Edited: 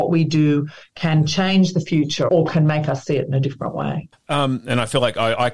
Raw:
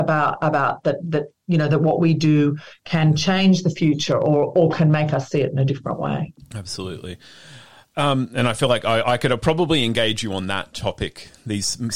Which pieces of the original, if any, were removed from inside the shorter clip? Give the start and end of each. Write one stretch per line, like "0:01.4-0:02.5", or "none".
0:04.2-0:04.5
0:06.4-0:07.8